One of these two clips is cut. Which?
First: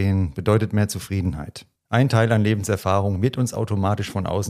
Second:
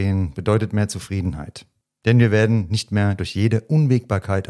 first; 1 cut; at 1.8 s

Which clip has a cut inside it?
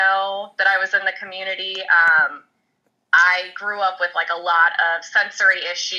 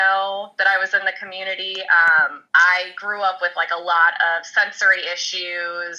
second; 1 cut; at 2.5 s

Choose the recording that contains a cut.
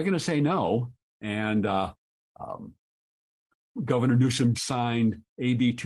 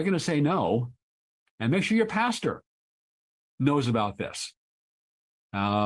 first; 2 cuts; at 1.1 s, 4.6 s

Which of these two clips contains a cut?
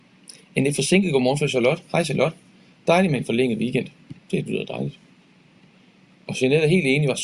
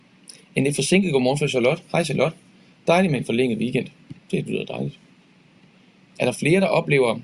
second; 1 cut; at 6.2 s

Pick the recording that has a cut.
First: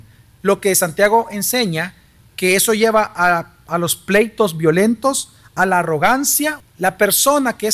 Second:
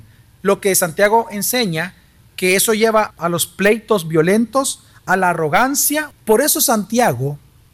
second; 2 cuts; at 3.1 s, 6.2 s

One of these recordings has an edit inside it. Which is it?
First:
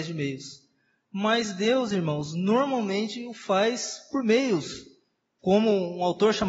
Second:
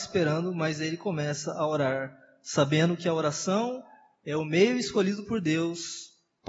first; 1 cut; at 5.4 s

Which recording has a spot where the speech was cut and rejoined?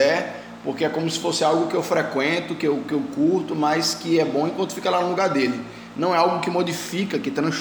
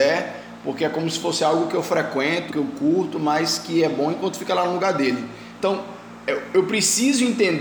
second; 2 cuts; at 2.5 s, 5.6 s

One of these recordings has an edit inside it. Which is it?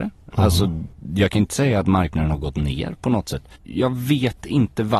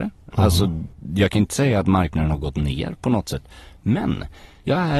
first; 1 cut; at 3.5 s

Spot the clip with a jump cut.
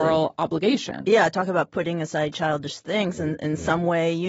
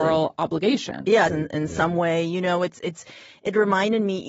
second; 1 cut; at 1.3 s

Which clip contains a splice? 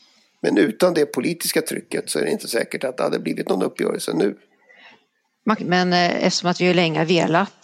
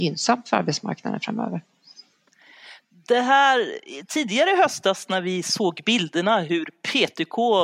first; 1 cut; at 5.6 s

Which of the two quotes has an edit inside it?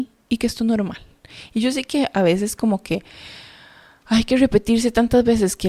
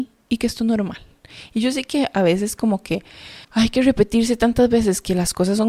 second; 1 cut; at 3.4 s

